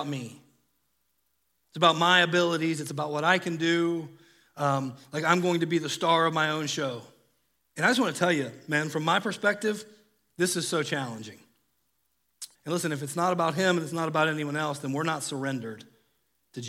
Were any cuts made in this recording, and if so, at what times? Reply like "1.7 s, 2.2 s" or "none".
7.6 s, 12.5 s